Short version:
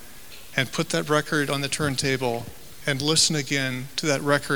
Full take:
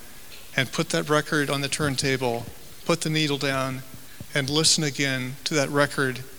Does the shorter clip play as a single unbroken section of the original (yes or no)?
no